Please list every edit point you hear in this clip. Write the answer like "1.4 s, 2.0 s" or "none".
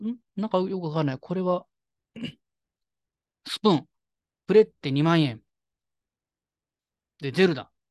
4.4 s